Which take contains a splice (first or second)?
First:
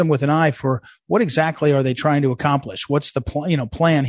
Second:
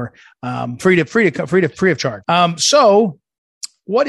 second